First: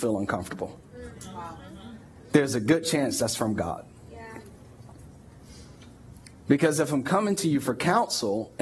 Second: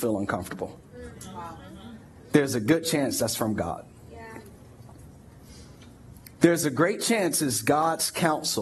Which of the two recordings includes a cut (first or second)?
second